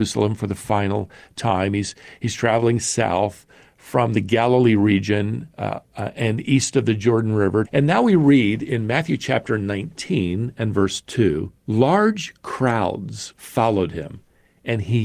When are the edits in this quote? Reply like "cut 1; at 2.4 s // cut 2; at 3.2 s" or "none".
cut 1; at 7.6 s // cut 2; at 11.6 s

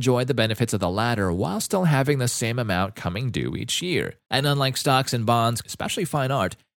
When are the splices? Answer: cut 1; at 4.3 s // cut 2; at 5.6 s

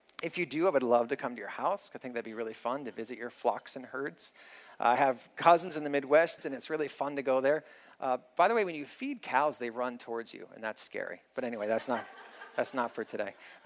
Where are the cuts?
cut 1; at 6.4 s

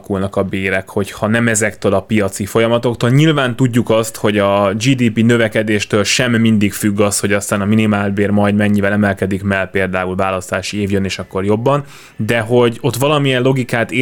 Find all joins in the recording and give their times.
none

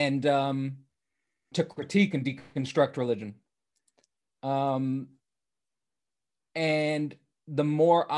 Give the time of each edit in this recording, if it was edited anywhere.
cut 1; at 1.5 s

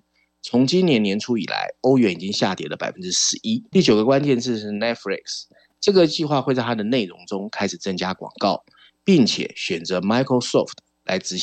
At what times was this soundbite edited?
cut 1; at 3.7 s // cut 2; at 5.7 s

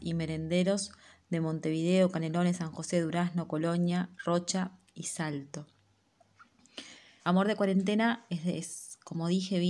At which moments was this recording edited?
cut 1; at 7.2 s

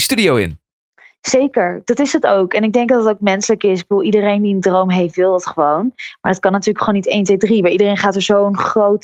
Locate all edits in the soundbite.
none

